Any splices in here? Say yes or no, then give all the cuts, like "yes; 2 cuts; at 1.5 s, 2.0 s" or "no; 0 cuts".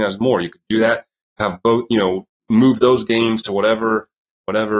no; 0 cuts